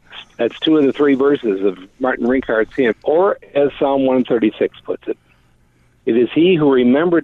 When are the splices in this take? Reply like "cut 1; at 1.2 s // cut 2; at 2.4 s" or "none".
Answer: cut 1; at 2.9 s